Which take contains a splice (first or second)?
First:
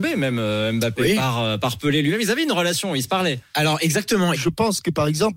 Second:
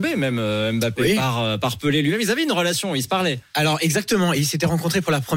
first